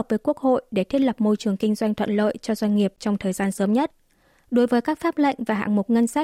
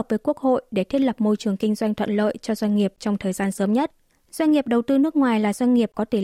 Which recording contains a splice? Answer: second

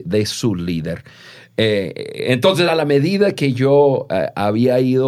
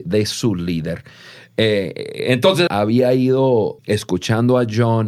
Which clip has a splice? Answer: second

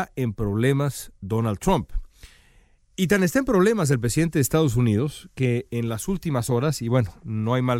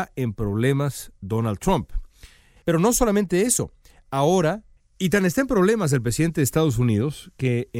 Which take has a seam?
second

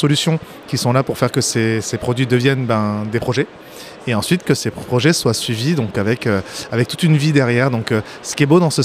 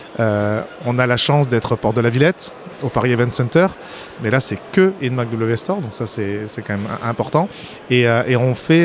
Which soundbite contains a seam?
second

